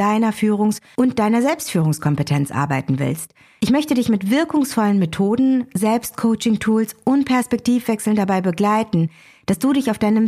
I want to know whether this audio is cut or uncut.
uncut